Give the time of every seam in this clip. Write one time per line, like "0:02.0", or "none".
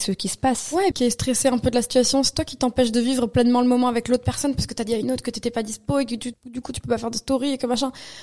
0:00.9
0:06.3